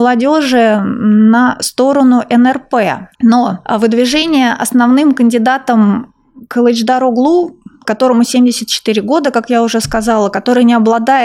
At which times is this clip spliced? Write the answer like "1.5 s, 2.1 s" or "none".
3.2 s